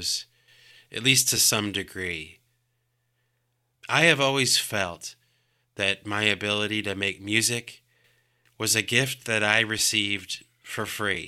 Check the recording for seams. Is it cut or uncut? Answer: uncut